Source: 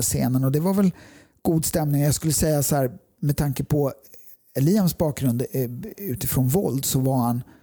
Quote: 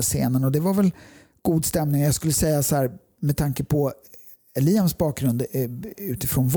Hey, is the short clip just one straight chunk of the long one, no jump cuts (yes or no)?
yes